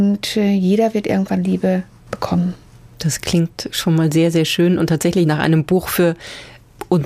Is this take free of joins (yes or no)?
yes